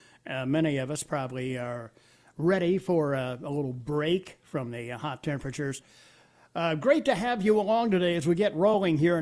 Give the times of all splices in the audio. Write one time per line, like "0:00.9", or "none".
none